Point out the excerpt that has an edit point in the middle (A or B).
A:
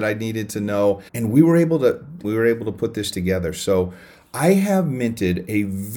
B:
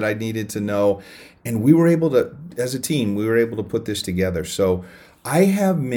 A